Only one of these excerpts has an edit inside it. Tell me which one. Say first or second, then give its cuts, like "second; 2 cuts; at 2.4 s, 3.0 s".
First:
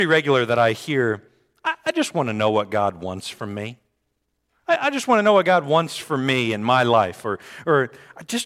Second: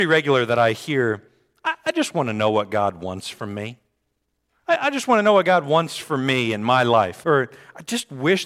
second; 1 cut; at 7.2 s